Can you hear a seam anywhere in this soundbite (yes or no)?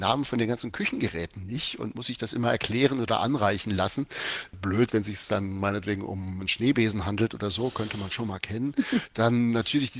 no